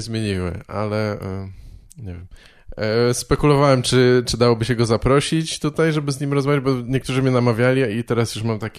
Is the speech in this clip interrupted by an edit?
no; 0 cuts

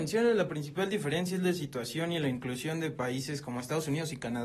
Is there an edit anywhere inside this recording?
no; 0 cuts

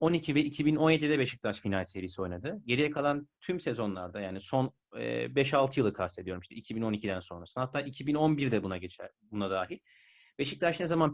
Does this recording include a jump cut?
no; 0 cuts

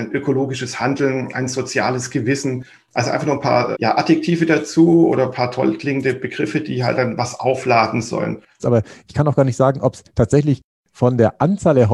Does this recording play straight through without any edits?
no; 2 cuts; at 3.7 s, 8.6 s

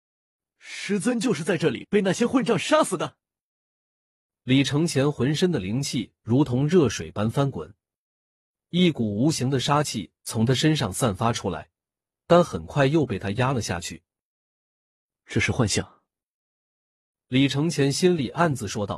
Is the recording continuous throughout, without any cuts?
yes; 0 cuts

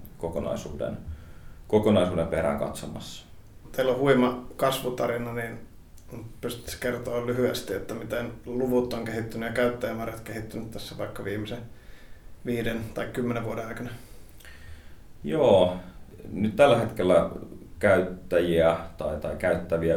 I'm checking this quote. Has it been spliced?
no; 0 cuts

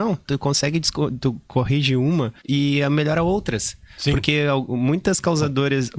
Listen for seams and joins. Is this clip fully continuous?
no; 1 cut; at 2.4 s

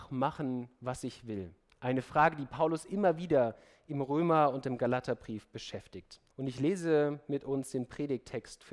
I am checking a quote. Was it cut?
yes; 1 cut; at 6.3 s

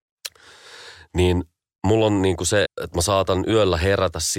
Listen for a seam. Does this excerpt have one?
yes; 1 cut; at 2.6 s

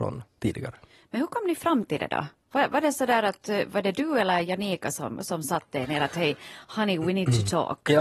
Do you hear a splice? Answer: no; 0 cuts

